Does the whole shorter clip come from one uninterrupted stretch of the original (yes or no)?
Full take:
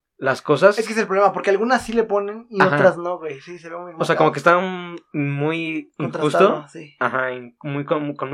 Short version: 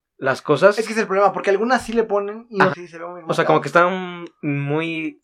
no